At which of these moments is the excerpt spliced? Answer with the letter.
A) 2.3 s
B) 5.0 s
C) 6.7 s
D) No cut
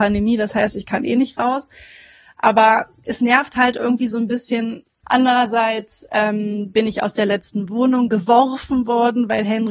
B